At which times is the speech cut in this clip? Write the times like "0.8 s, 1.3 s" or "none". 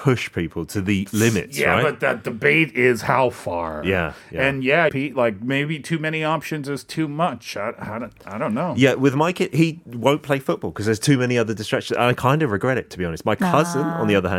4.9 s